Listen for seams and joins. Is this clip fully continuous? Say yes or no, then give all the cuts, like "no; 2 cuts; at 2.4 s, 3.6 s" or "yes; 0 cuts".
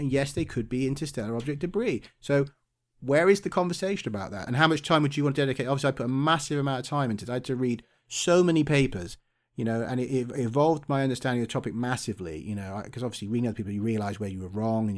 no; 1 cut; at 4.5 s